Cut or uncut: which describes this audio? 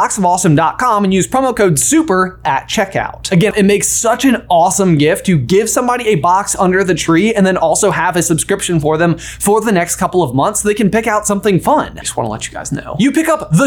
cut